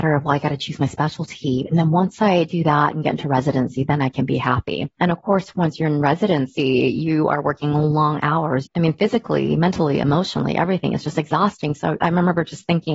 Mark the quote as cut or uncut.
cut